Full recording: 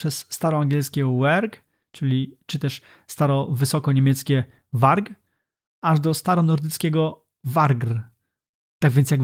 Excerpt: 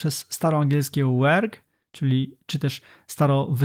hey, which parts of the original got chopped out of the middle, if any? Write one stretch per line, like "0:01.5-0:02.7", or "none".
none

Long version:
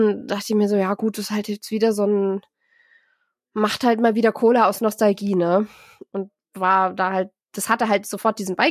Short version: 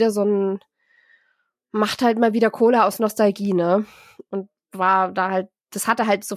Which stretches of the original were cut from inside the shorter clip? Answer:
none

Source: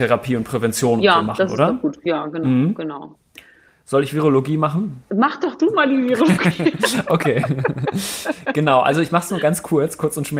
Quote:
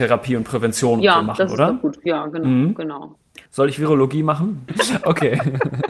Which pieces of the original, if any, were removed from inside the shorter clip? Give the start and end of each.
0:03.5-0:03.8
0:05.0-0:06.7

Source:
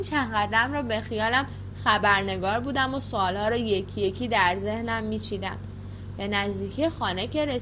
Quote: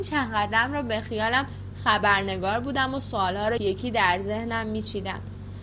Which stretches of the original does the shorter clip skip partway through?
0:03.6-0:03.9

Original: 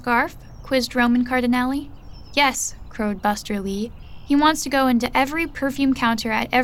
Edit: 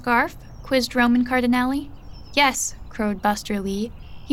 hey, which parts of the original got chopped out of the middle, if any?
none

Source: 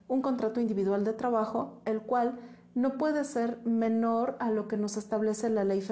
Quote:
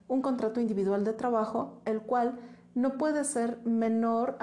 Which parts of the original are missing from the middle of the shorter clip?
none

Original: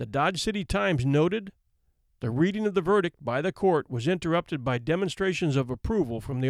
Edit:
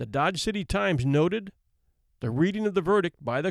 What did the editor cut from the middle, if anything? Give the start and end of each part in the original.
none

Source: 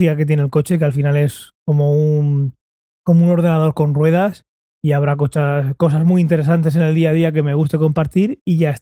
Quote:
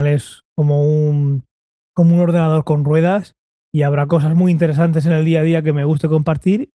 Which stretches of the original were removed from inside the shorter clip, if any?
0:05.2-0:05.8

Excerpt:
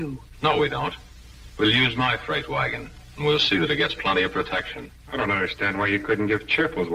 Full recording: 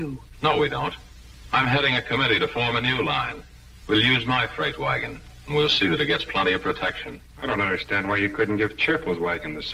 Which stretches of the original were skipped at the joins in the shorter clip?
0:01.5-0:03.8

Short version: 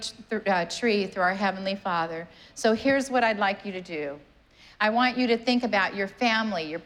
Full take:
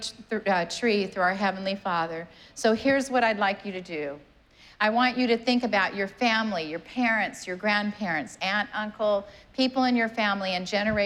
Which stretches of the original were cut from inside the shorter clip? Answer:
none

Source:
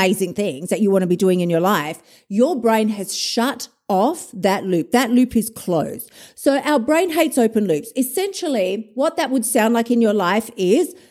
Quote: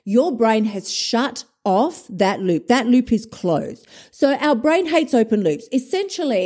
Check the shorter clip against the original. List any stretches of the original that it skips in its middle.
none

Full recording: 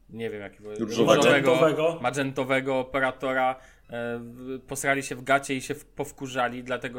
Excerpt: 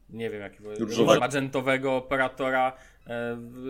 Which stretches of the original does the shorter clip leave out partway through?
0:01.2-0:02.0

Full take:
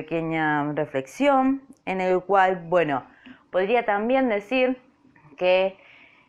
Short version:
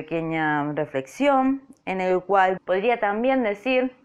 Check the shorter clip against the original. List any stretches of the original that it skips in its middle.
0:02.6-0:03.4

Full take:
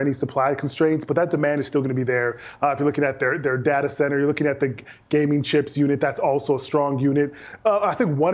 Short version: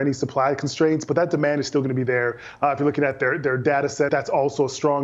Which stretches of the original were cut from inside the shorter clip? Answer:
0:04.1-0:06.0

